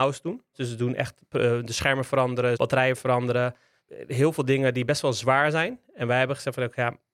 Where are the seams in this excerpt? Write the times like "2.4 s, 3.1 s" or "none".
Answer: none